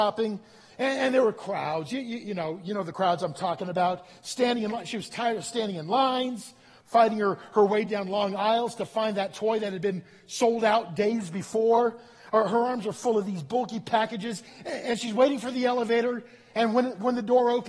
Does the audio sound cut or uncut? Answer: uncut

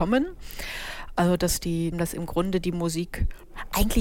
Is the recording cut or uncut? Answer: cut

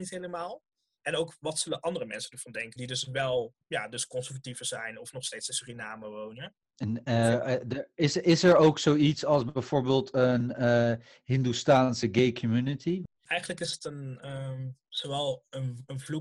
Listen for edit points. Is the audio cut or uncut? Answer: uncut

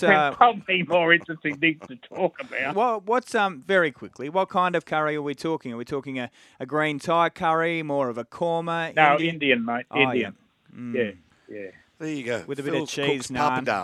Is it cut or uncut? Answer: cut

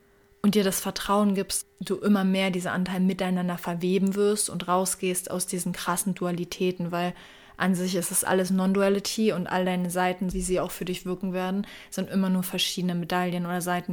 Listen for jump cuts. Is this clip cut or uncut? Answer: cut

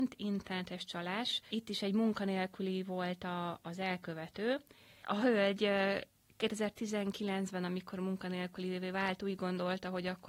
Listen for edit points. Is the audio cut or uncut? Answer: uncut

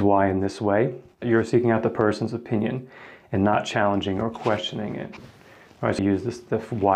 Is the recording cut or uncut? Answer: cut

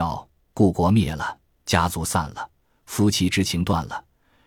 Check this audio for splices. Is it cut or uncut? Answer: uncut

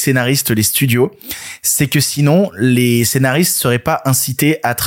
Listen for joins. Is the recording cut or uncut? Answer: uncut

